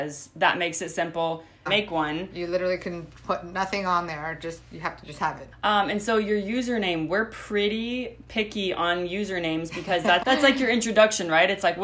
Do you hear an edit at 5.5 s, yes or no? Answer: yes